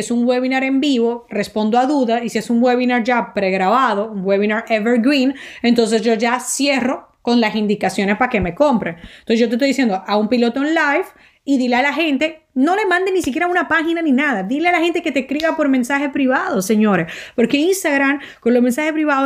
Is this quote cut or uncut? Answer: uncut